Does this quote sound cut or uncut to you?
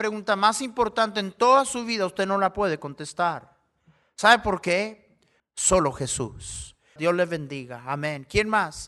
cut